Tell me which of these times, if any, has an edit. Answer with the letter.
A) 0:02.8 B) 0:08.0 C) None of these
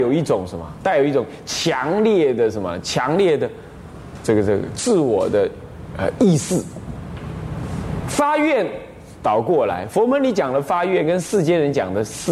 C